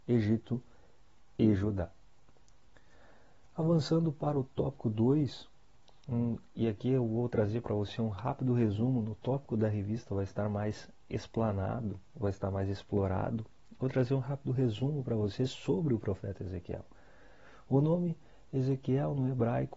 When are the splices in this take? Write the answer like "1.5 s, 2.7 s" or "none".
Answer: none